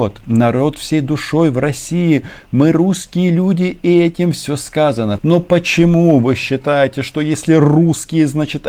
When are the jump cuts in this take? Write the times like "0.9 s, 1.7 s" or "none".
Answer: 5.2 s